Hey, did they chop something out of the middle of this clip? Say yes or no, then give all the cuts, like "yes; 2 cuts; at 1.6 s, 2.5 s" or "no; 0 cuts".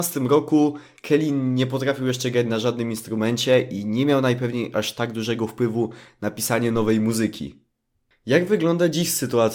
no; 0 cuts